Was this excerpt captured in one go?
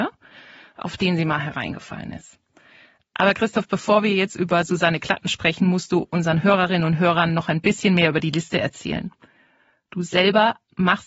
yes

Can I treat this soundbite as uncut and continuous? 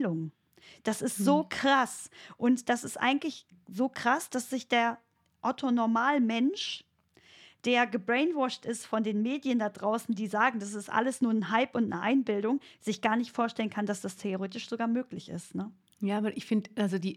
yes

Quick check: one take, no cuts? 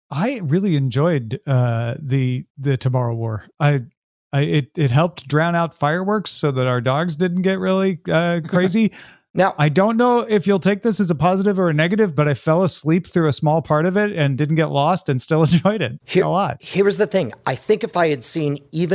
yes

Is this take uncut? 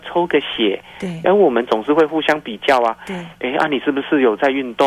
no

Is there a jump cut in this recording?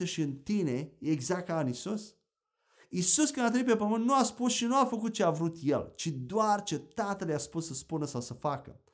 no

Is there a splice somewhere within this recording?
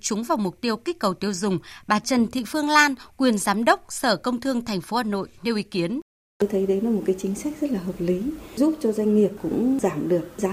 no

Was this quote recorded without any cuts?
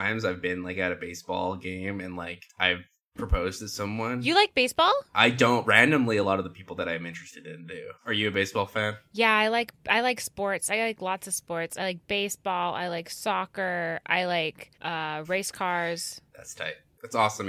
no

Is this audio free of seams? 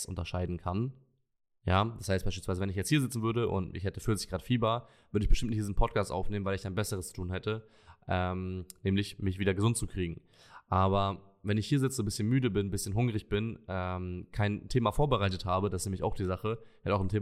yes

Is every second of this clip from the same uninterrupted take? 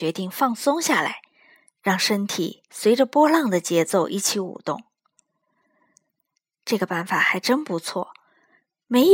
yes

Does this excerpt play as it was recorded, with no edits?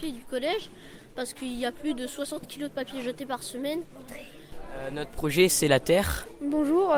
yes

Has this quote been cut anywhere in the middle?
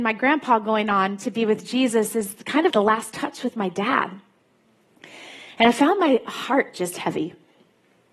yes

